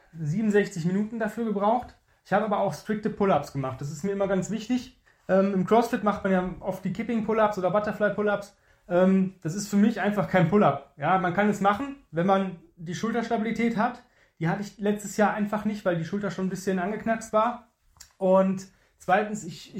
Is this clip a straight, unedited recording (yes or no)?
yes